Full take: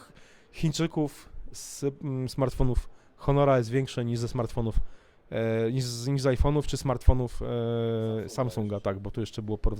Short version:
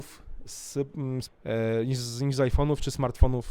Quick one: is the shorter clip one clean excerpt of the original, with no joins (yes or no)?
no